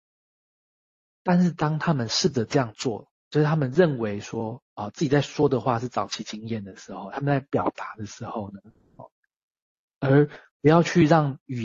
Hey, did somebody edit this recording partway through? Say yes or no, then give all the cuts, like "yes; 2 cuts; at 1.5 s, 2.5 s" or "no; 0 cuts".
no; 0 cuts